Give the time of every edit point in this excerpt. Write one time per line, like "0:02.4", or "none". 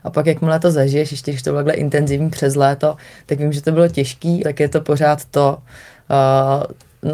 0:04.4